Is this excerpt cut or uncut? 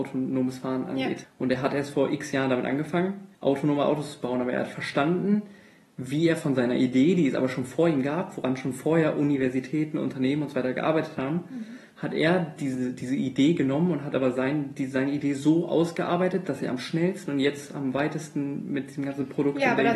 cut